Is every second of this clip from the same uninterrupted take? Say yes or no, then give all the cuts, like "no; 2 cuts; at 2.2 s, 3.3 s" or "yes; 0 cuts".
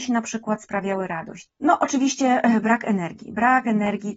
no; 1 cut; at 1.5 s